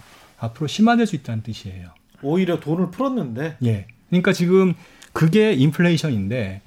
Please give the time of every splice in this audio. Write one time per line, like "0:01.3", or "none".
none

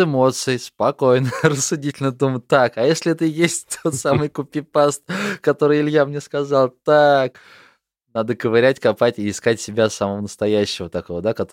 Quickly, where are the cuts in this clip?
none

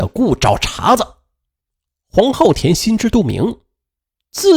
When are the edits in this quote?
none

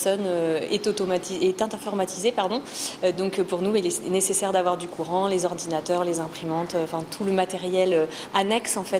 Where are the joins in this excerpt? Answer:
none

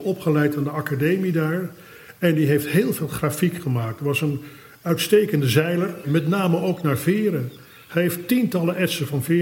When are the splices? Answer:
0:06.0

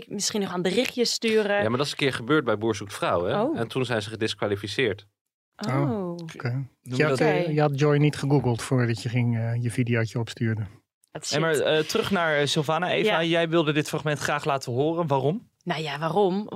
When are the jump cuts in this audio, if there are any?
0:11.1

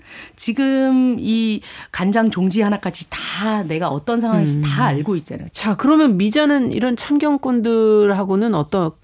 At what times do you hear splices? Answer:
0:05.5

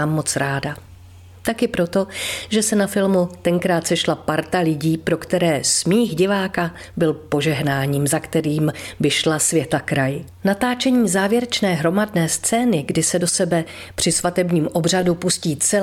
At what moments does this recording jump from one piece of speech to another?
0:10.3

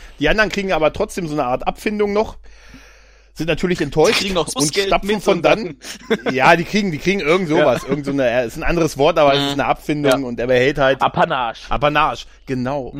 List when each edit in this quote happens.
none

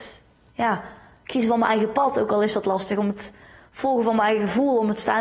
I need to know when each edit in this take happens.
none

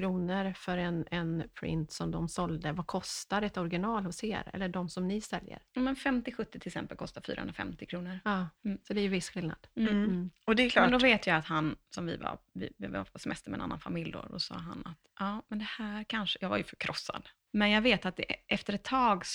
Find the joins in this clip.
0:08.6
0:17.4

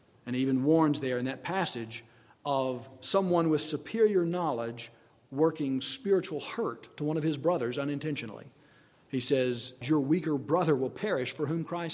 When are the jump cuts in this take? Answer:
0:09.8

